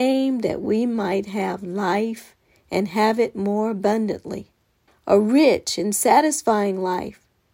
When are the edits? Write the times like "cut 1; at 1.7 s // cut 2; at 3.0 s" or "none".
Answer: cut 1; at 4.9 s